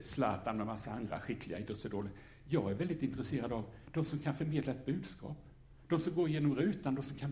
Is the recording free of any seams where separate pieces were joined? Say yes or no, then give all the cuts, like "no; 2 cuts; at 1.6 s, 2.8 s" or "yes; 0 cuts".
yes; 0 cuts